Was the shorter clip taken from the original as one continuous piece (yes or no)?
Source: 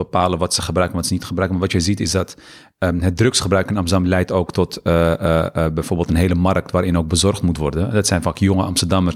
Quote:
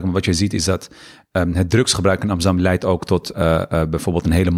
no